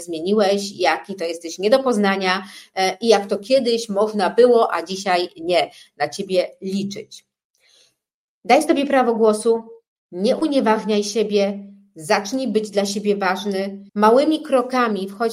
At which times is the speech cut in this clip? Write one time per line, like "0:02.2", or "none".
0:13.9